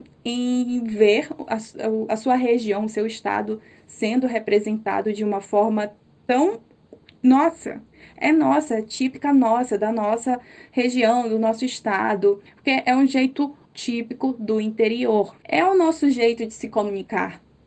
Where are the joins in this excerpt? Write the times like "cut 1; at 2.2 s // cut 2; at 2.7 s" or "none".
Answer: cut 1; at 12.5 s // cut 2; at 13.7 s // cut 3; at 15.4 s